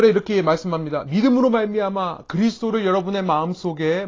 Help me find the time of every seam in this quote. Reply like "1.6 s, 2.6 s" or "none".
none